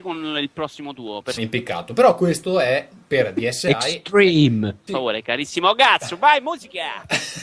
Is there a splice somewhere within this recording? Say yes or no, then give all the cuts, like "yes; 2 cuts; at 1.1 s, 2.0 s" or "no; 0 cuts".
yes; 2 cuts; at 1.4 s, 4.9 s